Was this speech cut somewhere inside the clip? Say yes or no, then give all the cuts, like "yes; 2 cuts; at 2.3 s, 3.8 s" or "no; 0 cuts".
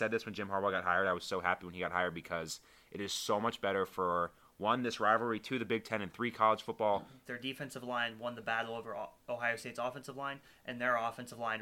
yes; 1 cut; at 7.3 s